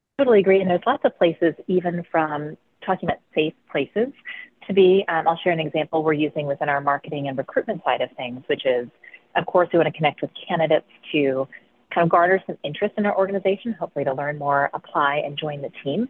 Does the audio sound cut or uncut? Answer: uncut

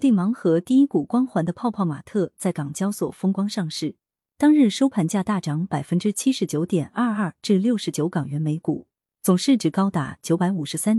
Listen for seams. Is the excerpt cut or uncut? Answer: uncut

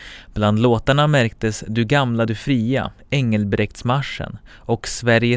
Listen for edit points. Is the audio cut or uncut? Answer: uncut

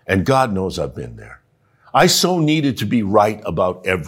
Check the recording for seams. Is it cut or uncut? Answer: uncut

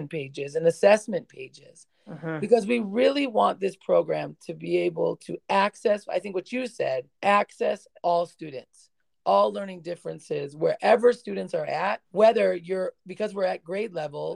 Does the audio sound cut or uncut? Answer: cut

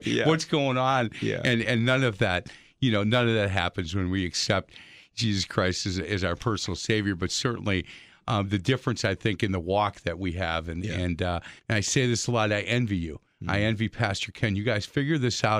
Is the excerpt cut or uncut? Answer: cut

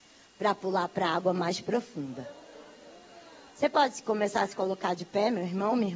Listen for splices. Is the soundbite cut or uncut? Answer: uncut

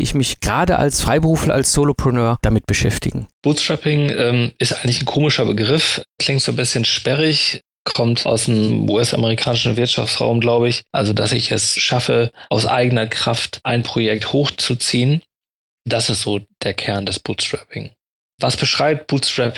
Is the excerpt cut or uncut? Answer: cut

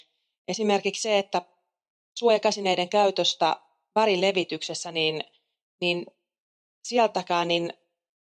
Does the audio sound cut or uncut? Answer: uncut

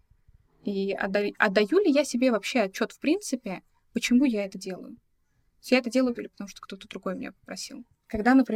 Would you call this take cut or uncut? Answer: cut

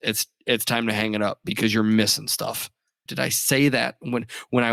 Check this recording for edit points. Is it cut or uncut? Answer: cut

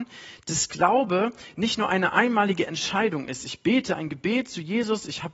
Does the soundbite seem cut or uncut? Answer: uncut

